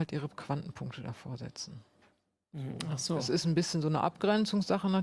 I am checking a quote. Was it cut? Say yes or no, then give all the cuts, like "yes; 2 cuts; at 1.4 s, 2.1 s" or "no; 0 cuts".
no; 0 cuts